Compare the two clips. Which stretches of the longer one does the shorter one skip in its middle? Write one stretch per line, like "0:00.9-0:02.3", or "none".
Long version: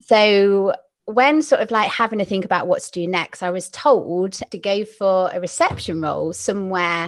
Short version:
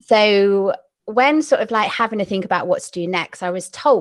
none